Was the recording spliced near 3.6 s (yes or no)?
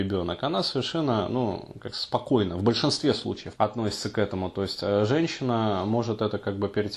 yes